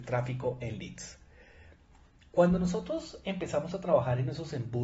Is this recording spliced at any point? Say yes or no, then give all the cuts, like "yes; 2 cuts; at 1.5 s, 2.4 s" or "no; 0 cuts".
no; 0 cuts